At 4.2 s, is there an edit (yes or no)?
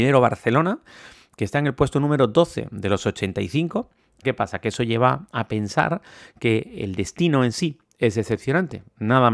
yes